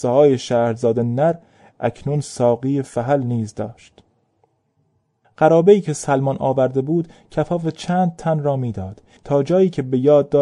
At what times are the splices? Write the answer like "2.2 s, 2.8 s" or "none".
9.2 s